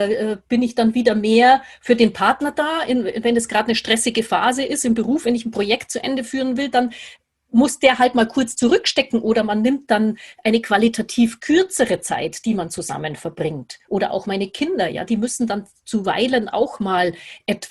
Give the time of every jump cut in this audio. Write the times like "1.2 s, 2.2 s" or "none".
none